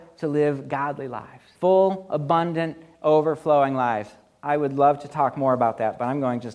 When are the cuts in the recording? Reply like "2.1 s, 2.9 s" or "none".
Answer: 1.5 s